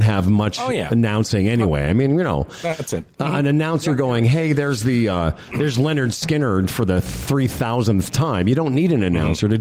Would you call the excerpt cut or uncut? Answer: uncut